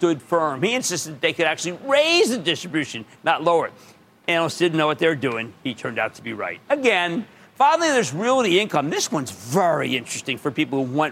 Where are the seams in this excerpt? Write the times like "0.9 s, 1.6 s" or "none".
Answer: none